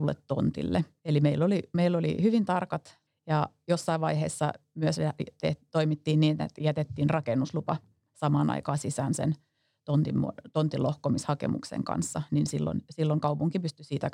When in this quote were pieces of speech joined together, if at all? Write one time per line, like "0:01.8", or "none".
0:01.0
0:03.1